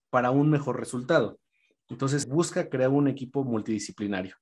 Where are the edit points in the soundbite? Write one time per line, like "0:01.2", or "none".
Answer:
0:02.2